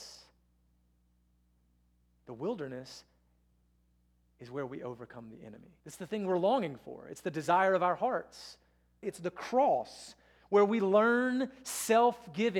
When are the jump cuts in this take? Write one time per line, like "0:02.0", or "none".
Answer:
0:05.8
0:09.0